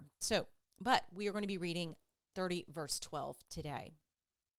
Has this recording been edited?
yes; 1 cut; at 2.3 s

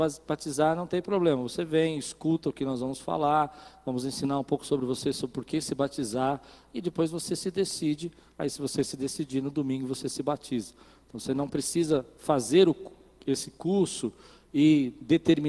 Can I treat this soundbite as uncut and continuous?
yes; 0 cuts

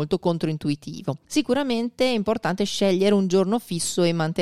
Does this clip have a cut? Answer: no; 0 cuts

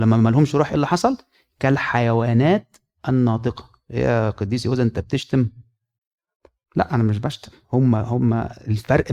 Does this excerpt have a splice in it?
no; 0 cuts

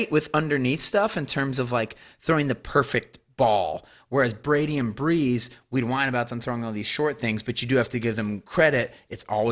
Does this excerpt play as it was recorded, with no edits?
yes; 0 cuts

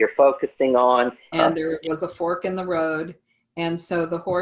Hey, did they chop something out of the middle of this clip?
yes; 1 cut; at 1.3 s

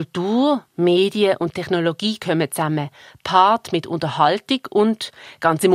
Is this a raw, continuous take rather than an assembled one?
yes; 0 cuts

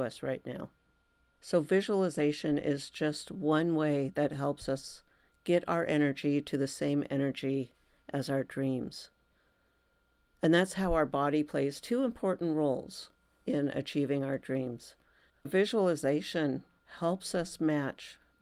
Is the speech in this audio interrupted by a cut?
yes; 1 cut; at 15.3 s

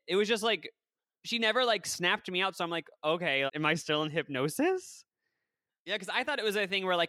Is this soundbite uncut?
no; 2 cuts; at 3.5 s, 5.7 s

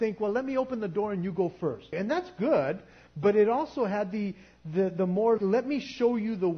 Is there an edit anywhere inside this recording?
yes; 2 cuts; at 1.9 s, 5.4 s

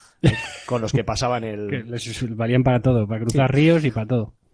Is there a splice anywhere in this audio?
no; 0 cuts

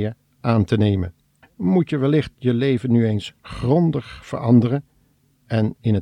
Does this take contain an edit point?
yes; 1 cut; at 1.4 s

